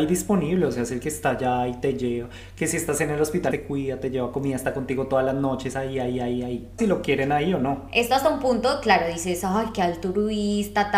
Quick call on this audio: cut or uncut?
cut